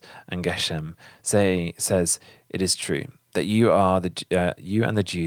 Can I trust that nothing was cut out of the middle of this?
yes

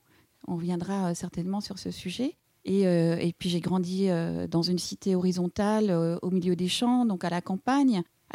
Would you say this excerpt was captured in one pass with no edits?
yes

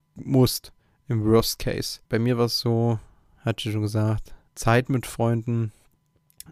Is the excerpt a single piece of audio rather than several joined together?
no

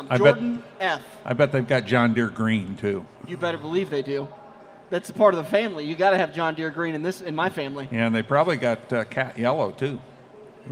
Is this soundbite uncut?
yes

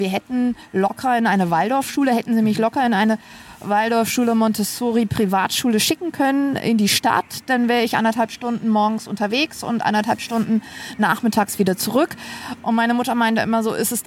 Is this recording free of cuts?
yes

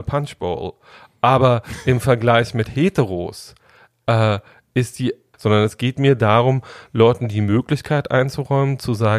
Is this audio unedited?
no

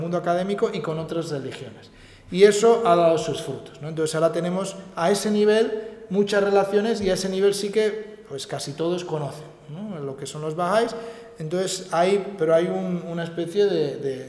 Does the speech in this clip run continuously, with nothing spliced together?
yes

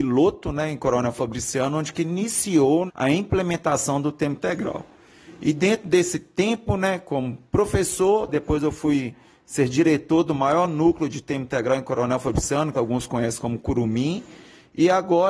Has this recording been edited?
yes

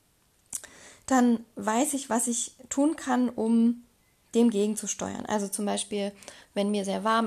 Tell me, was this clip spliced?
no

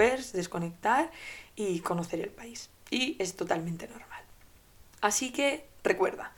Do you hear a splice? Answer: no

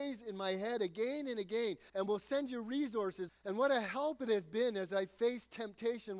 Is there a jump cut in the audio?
yes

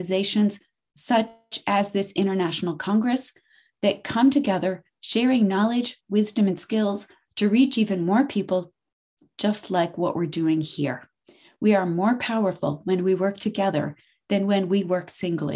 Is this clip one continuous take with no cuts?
yes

